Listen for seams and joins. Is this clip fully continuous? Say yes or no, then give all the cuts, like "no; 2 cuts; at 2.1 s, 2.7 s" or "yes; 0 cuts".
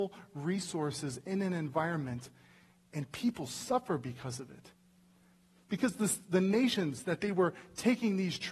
yes; 0 cuts